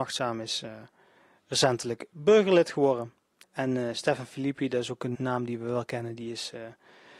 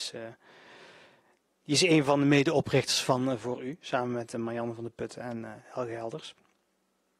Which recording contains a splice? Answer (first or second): first